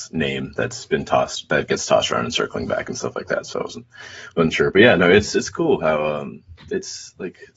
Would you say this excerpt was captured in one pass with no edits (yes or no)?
yes